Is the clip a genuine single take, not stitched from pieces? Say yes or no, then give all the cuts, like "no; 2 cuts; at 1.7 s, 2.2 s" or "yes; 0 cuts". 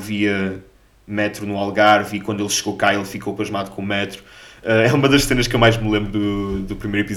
yes; 0 cuts